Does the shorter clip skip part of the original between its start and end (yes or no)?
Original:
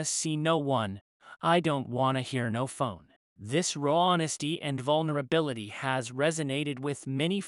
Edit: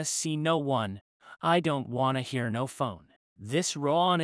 no